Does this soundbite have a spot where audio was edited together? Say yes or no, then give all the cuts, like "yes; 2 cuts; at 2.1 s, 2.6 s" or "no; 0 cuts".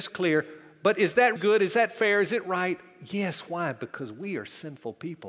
yes; 1 cut; at 1.4 s